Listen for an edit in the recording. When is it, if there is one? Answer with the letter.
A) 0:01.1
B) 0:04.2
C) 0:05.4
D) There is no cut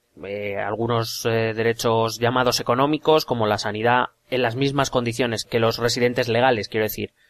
C